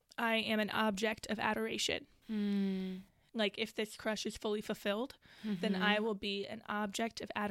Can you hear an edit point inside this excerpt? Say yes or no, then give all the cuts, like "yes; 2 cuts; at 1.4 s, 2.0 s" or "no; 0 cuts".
no; 0 cuts